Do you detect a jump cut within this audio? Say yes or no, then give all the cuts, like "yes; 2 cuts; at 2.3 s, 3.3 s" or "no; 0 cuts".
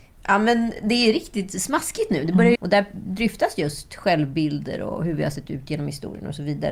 yes; 1 cut; at 2.6 s